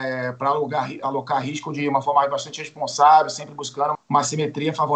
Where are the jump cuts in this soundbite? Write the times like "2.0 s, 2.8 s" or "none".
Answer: 3.9 s